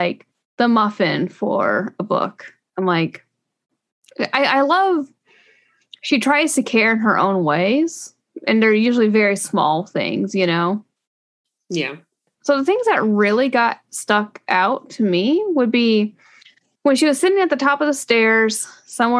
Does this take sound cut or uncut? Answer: cut